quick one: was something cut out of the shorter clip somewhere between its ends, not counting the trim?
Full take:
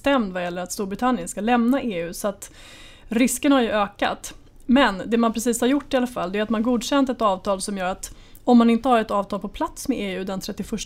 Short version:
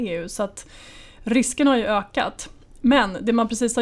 no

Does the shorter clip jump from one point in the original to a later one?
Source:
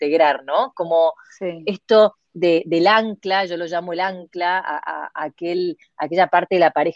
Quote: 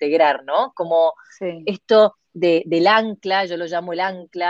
no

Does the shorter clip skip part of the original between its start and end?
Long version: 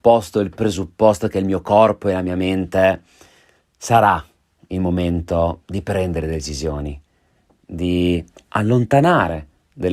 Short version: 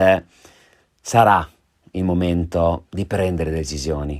no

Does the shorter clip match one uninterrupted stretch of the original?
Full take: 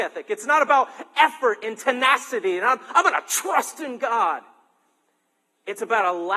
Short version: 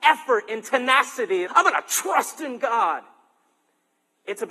no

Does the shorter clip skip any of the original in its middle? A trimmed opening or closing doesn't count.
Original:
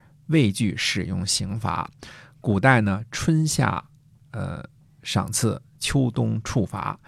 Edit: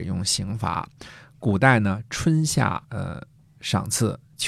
yes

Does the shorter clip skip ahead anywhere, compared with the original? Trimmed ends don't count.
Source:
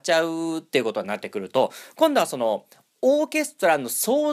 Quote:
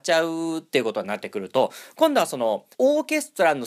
yes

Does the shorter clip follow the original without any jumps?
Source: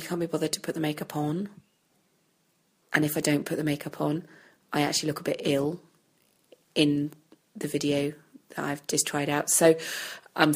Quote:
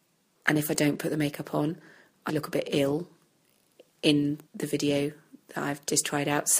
no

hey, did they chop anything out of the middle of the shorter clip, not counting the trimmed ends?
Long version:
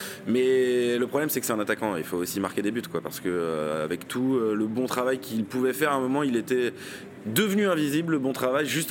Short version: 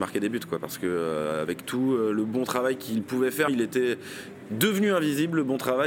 yes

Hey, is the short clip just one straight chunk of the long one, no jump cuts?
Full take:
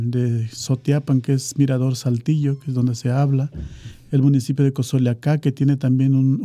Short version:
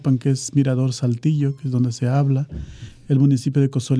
yes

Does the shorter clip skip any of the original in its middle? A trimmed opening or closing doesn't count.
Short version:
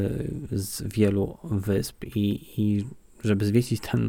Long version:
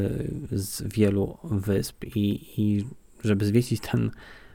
no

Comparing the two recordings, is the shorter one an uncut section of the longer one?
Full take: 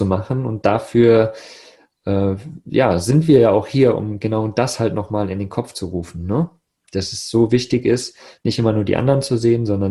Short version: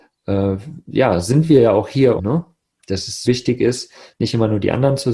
no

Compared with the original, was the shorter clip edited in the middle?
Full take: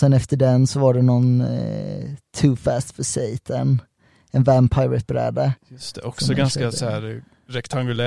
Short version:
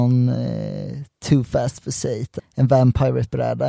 yes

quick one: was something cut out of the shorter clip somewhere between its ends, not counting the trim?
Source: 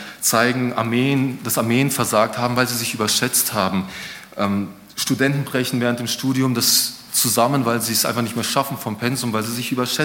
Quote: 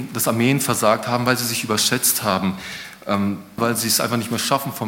yes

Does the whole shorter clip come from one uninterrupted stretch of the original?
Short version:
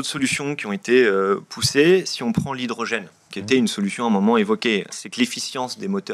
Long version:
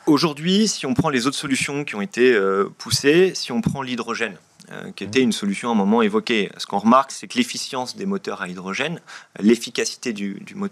no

